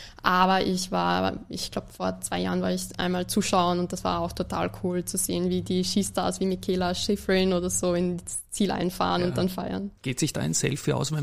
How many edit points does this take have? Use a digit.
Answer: 1